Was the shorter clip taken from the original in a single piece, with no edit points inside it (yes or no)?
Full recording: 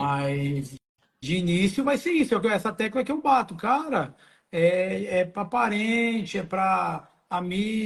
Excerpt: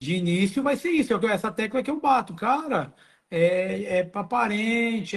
yes